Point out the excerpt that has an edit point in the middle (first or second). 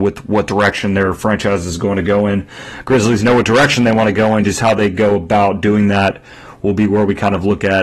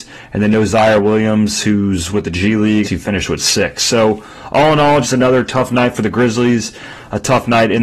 second